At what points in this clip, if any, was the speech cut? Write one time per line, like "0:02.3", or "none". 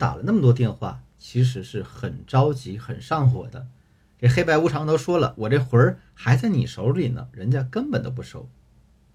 0:04.0